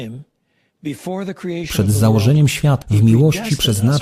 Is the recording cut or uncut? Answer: cut